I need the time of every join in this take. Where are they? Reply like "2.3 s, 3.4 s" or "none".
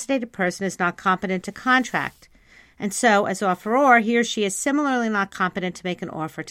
none